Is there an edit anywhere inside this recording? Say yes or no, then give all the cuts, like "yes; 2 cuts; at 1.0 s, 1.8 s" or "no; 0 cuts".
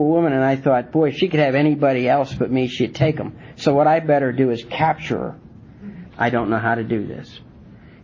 yes; 1 cut; at 6.1 s